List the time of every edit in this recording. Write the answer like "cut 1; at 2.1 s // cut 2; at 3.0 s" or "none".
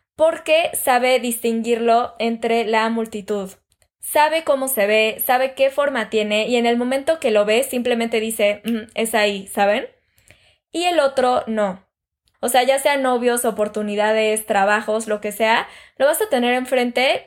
cut 1; at 12.3 s